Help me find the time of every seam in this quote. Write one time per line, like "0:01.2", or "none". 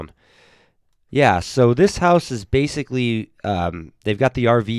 0:01.1